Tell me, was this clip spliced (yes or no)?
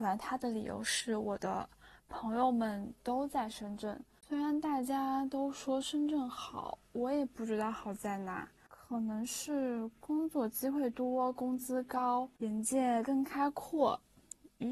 no